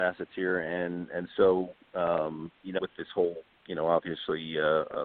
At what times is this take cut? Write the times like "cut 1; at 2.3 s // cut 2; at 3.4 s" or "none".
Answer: cut 1; at 2.8 s